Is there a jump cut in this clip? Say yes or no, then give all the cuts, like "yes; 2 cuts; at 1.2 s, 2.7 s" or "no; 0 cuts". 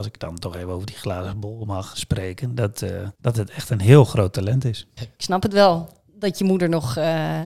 yes; 3 cuts; at 1.9 s, 3.1 s, 5.0 s